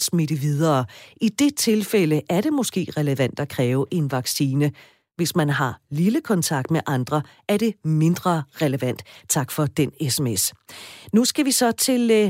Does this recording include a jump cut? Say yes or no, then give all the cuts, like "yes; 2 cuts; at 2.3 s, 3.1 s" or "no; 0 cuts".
no; 0 cuts